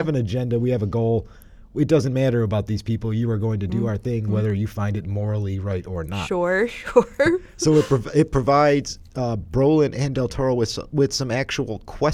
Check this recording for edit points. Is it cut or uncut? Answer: uncut